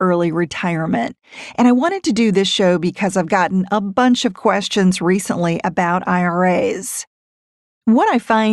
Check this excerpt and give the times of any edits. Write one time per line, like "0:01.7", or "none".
none